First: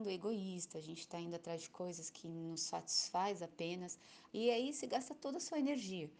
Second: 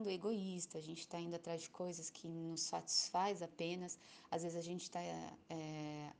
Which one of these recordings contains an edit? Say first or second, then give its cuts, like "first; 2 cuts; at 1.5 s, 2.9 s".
first; 1 cut; at 4.3 s